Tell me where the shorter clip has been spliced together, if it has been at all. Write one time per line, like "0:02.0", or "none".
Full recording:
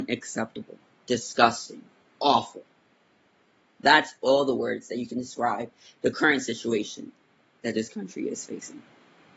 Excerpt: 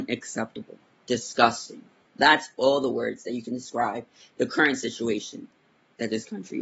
0:02.1